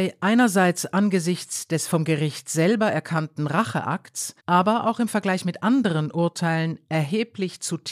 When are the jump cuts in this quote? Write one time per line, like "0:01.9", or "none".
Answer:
0:04.4